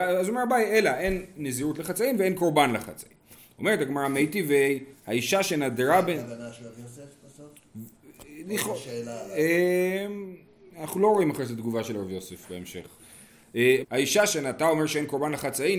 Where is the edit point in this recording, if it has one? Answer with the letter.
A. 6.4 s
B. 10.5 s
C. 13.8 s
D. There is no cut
C